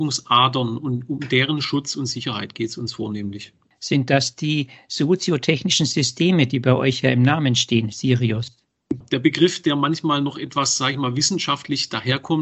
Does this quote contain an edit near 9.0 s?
yes; 1 cut; at 9.0 s

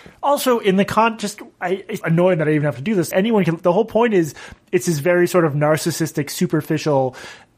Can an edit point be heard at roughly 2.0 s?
yes; 2 cuts; at 2.0 s, 3.1 s

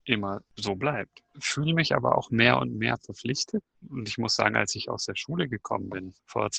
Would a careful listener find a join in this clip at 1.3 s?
yes; 1 cut; at 1.3 s

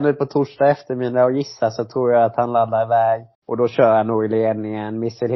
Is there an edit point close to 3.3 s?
yes; 1 cut; at 3.3 s

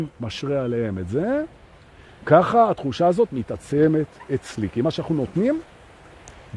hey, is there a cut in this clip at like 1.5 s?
no; 0 cuts

